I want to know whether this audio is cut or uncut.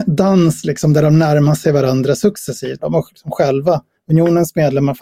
cut